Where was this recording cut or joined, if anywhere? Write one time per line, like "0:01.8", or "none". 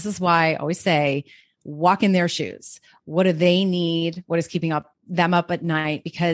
none

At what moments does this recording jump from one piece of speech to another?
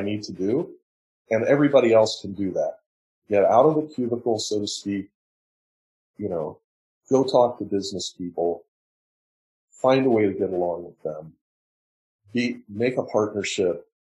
none

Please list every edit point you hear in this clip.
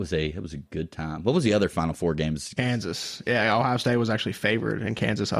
0:02.6

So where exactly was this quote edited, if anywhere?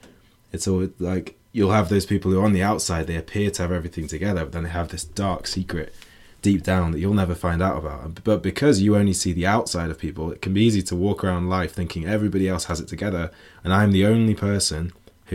none

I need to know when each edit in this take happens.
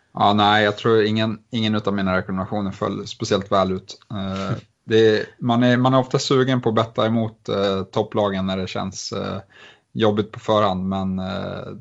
none

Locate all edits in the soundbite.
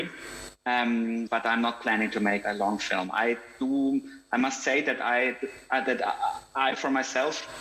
0:02.4

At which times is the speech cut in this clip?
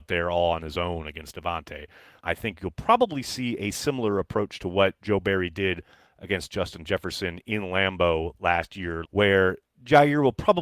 0:02.2
0:09.0

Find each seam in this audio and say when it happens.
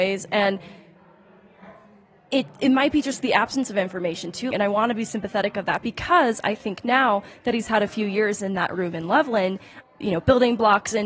0:04.5
0:09.8

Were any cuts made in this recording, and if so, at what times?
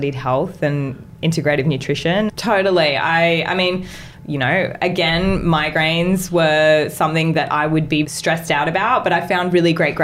0:02.3
0:08.0

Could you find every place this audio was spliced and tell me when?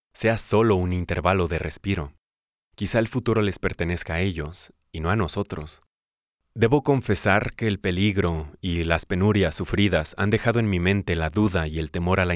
none

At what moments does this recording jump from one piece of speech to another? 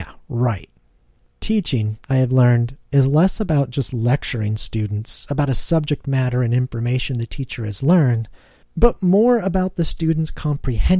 none

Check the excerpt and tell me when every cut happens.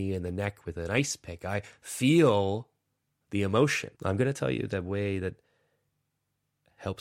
0:03.9

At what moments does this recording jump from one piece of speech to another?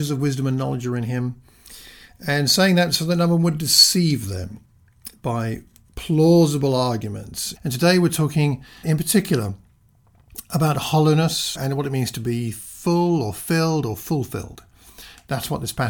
0:07.6
0:08.8
0:11.5

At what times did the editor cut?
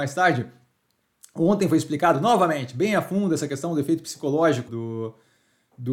0:04.7

